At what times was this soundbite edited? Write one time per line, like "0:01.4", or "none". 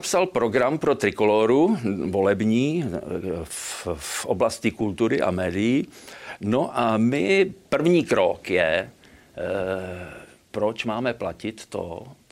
none